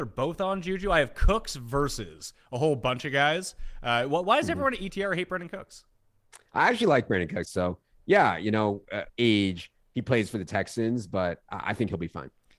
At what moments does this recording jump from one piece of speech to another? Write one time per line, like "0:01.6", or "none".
0:07.4
0:09.1